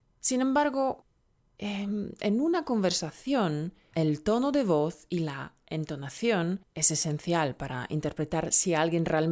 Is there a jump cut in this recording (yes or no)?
yes